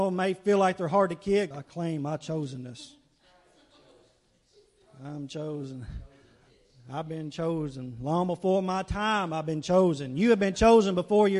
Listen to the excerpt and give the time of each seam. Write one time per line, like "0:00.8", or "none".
0:01.5